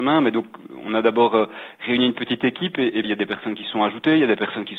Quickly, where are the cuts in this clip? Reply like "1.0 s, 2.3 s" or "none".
3.0 s